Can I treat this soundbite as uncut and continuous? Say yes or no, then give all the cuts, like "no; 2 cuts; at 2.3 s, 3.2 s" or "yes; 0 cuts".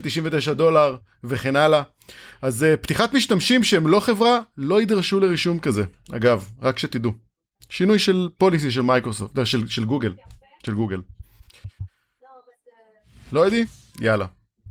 yes; 0 cuts